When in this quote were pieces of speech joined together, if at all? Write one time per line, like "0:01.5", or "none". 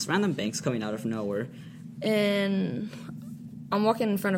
0:02.0